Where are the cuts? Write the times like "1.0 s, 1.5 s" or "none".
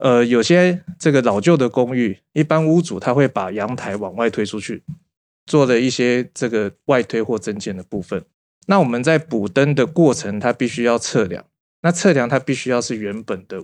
none